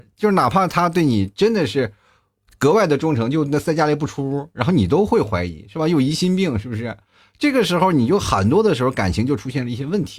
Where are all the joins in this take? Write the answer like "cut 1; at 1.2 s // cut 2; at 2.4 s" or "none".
none